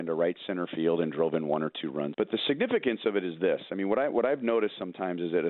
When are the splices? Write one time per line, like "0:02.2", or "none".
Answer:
0:02.1